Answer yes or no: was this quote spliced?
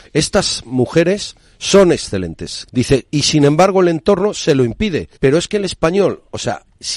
yes